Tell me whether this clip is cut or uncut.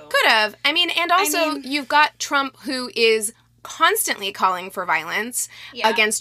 uncut